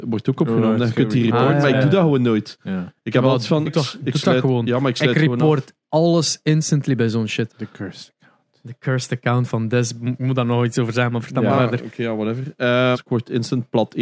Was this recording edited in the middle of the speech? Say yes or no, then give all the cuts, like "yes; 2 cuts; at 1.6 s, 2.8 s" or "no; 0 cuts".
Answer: yes; 3 cuts; at 3.7 s, 7.5 s, 12.9 s